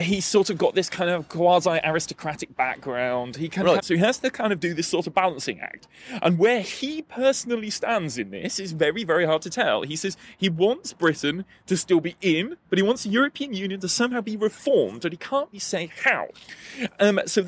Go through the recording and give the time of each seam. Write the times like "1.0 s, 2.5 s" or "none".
3.8 s, 12.6 s, 15.5 s

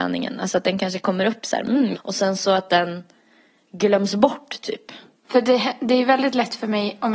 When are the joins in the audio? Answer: 1.9 s, 5.2 s

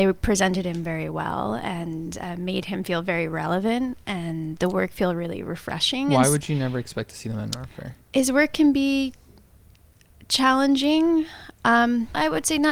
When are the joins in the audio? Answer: none

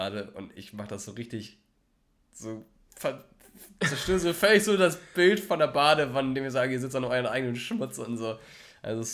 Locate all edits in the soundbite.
none

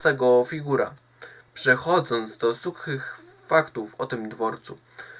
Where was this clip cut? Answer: none

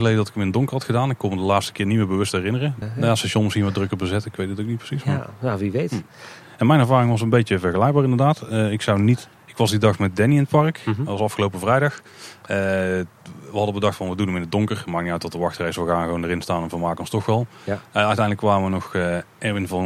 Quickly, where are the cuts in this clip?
2.8 s, 9.3 s

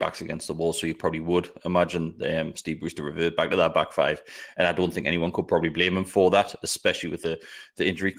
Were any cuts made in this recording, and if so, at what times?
none

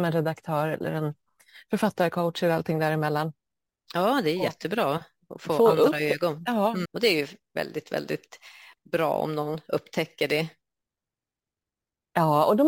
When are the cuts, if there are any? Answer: 6.9 s

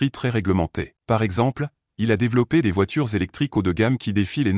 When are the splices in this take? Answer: 1.0 s

